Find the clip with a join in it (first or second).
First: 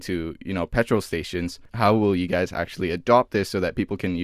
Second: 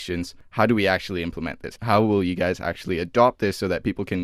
first